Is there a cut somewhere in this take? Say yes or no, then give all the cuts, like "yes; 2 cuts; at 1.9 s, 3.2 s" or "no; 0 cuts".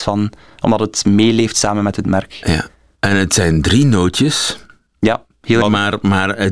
yes; 1 cut; at 5.6 s